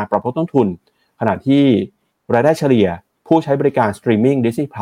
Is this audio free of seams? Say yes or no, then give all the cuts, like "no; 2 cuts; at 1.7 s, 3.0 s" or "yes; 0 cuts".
yes; 0 cuts